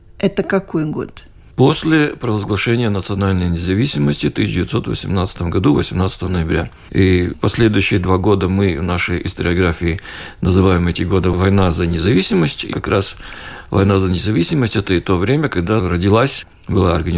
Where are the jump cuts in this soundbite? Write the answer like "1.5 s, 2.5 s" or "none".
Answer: 12.7 s